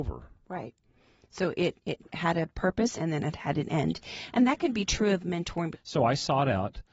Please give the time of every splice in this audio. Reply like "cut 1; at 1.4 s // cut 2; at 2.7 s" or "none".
cut 1; at 2.9 s // cut 2; at 5.7 s